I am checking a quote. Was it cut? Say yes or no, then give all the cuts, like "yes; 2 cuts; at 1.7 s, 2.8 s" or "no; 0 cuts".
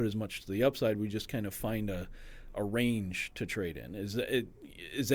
no; 0 cuts